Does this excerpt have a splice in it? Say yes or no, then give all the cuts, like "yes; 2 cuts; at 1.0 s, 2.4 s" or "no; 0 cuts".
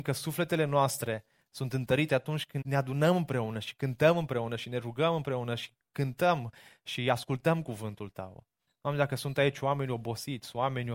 yes; 2 cuts; at 2.6 s, 8.7 s